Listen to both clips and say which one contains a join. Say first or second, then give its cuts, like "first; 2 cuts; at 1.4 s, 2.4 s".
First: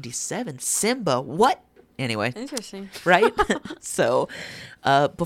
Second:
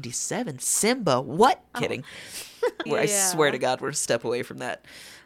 second; 2 cuts; at 1.7 s, 2.9 s